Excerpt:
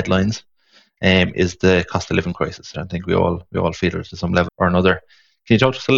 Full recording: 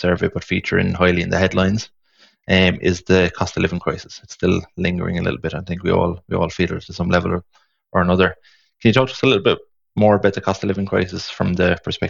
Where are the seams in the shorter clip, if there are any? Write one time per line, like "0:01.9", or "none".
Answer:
0:02.7
0:04.5